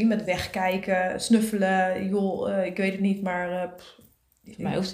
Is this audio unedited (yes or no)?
yes